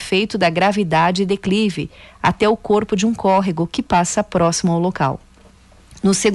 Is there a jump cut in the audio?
no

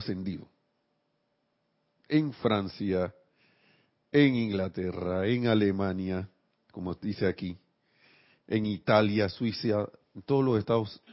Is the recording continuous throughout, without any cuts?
yes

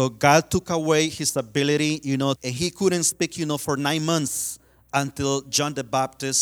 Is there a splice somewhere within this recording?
yes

